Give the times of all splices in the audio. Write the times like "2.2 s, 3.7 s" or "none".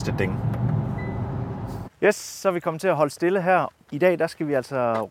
1.9 s, 3.7 s